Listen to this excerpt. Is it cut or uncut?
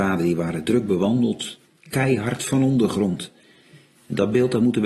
cut